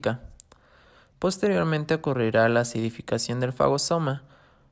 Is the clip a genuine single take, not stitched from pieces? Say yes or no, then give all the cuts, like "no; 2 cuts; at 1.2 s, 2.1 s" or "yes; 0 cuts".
yes; 0 cuts